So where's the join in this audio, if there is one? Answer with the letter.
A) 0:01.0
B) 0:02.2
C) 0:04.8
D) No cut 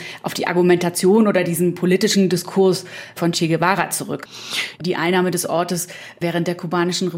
C